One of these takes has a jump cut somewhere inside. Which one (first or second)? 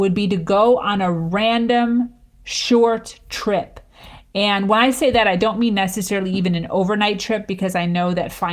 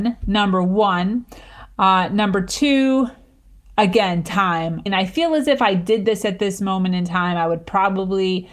second